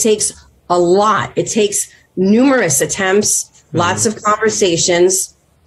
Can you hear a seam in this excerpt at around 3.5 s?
yes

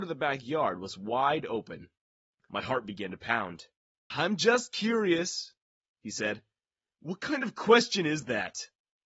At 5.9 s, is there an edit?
no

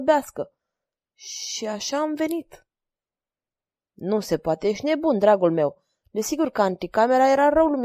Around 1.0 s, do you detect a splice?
no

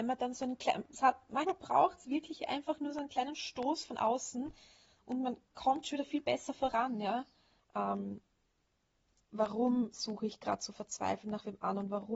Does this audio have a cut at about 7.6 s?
yes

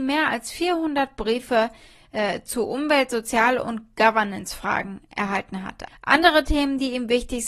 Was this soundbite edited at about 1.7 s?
no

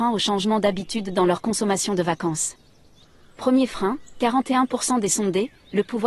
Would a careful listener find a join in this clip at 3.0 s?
no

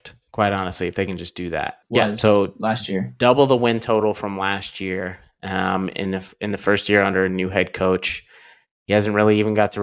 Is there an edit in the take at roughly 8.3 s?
no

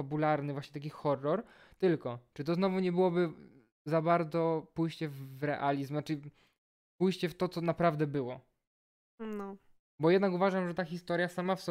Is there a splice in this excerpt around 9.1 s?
yes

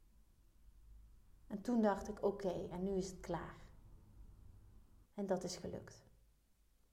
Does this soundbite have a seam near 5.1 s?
yes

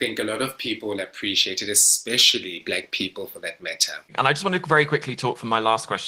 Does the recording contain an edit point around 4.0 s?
no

